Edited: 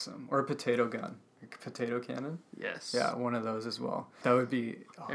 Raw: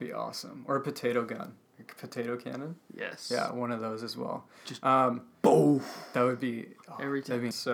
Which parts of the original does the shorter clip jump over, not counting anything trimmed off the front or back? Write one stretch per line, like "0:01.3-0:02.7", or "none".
0:04.6-0:06.1